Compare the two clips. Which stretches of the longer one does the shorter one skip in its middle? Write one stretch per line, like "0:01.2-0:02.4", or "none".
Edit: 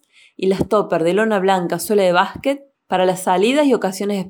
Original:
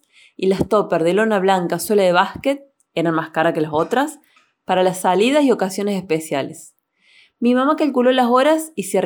0:02.7-0:04.5